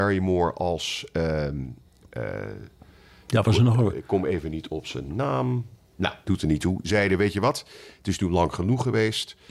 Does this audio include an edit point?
no; 0 cuts

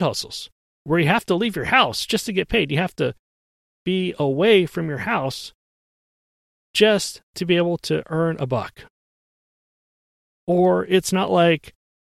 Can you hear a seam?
no; 0 cuts

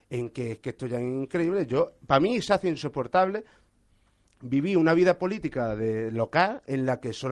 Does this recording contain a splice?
no; 0 cuts

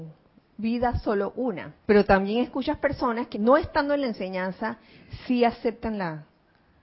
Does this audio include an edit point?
yes; 2 cuts; at 1.8 s, 3.3 s

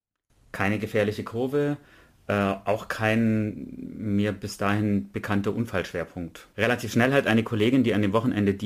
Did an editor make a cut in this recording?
no; 0 cuts

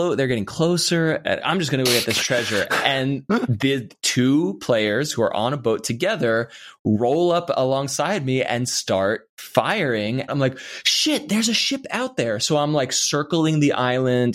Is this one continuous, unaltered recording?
no; 2 cuts; at 1.4 s, 10.3 s

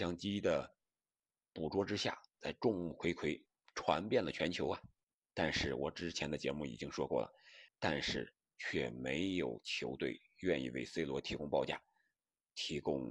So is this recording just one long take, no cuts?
no; 2 cuts; at 5.2 s, 7.7 s

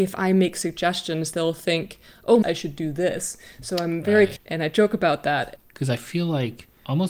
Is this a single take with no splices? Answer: no; 3 cuts; at 2.4 s, 4.4 s, 5.6 s

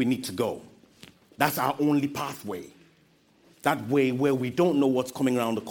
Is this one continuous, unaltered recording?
yes; 0 cuts

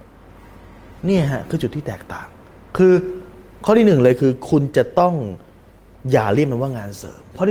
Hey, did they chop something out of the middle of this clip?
no; 0 cuts

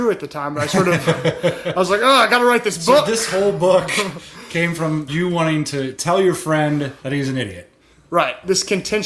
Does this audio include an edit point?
no; 0 cuts

